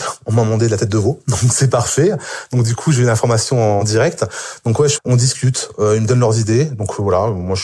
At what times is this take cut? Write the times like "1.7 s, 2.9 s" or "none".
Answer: 5.0 s